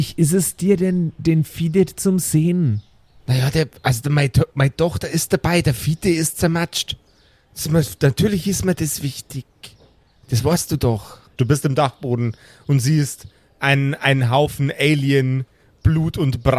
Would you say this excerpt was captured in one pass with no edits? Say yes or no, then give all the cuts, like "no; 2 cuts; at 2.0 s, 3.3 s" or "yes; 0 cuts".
no; 1 cut; at 11.4 s